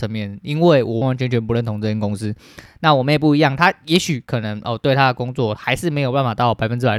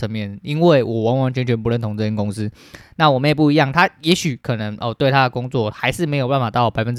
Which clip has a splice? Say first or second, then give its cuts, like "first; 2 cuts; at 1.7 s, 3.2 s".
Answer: first; 1 cut; at 1.0 s